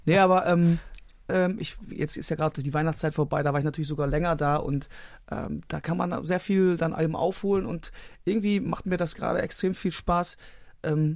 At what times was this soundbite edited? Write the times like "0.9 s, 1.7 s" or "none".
1.3 s